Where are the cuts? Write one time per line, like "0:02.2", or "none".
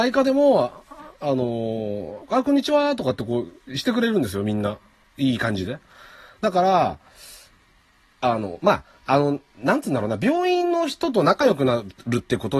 0:05.0